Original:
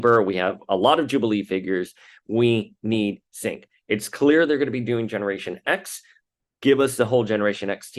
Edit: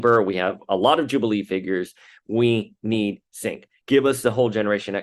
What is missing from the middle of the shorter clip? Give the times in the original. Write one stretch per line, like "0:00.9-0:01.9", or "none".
0:03.8-0:06.6